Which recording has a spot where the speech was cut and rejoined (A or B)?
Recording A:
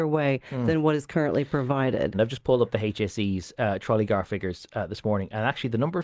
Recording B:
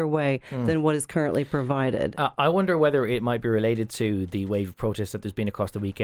A